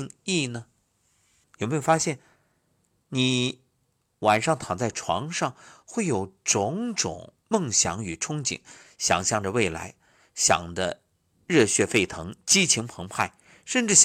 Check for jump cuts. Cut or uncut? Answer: cut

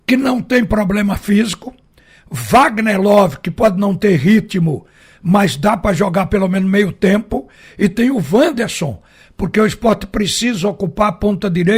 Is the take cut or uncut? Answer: uncut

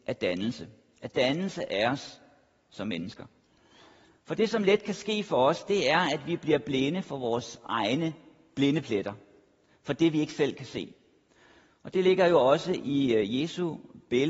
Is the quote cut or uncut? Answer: uncut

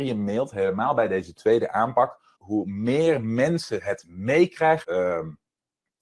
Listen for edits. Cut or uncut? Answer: cut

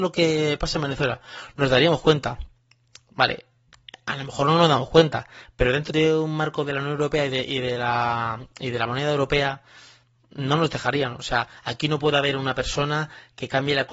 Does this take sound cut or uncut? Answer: cut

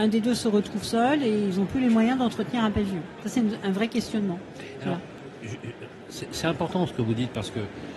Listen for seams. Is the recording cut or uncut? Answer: uncut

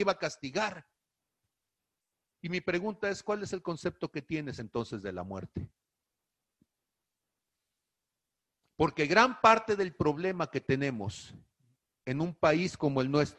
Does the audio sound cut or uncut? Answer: uncut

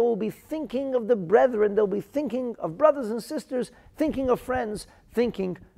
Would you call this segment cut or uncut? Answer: uncut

